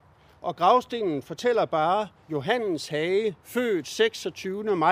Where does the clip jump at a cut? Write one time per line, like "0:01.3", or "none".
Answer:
0:02.2
0:03.4